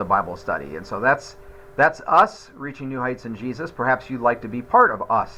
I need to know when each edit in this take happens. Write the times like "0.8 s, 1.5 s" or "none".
none

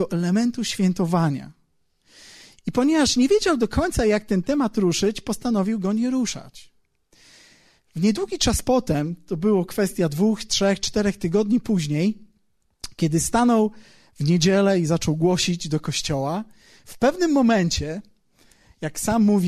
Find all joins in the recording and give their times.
none

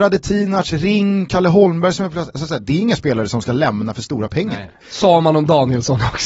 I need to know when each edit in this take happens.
1.3 s, 4.8 s

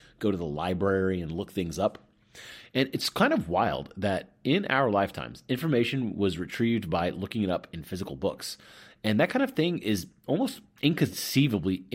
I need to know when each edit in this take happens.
none

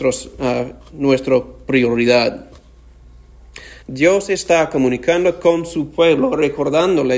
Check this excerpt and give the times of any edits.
3.8 s

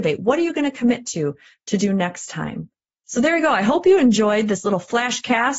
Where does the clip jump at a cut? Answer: 2.9 s

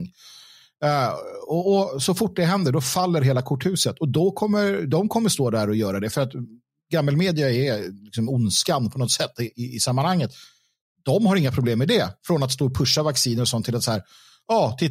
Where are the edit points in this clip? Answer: none

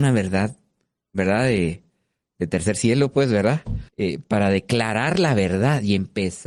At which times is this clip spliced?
3.9 s

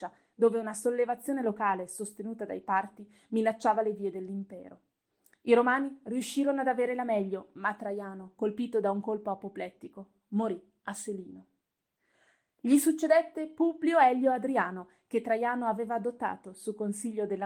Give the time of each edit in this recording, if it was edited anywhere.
none

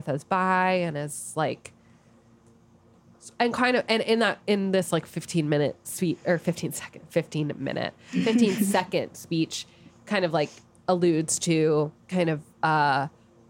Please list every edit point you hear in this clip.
12.0 s

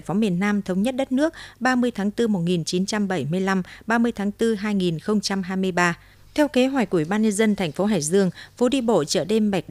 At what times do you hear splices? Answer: 6.1 s

